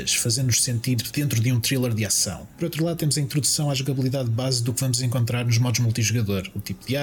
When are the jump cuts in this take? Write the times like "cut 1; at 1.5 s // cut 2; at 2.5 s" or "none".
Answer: none